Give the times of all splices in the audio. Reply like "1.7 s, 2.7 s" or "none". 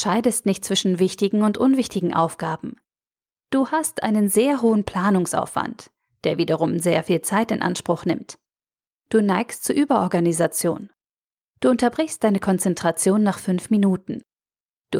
none